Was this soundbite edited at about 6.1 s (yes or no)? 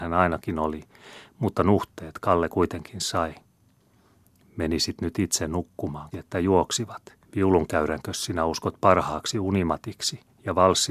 yes